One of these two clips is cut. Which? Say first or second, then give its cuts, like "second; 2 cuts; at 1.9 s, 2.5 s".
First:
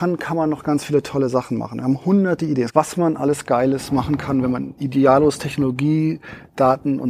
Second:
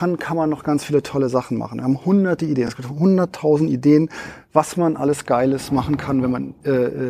first; 2 cuts; at 2.7 s, 4.8 s